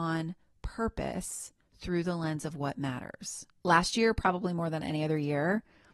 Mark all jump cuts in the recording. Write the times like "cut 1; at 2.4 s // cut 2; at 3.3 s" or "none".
cut 1; at 3.6 s